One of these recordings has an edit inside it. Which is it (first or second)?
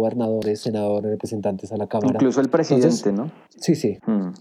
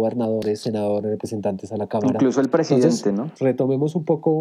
second